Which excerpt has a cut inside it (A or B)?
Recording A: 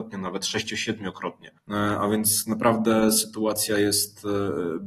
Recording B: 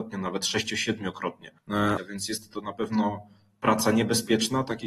B